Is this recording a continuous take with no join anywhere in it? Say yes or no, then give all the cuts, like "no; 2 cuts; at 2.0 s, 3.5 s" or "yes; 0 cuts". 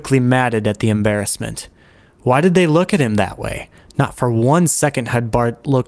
yes; 0 cuts